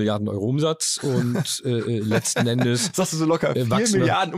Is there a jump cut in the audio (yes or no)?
no